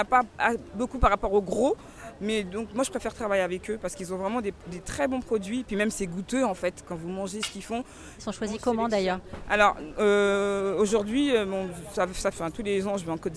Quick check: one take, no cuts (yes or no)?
no